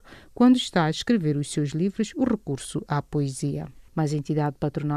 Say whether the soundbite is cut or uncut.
cut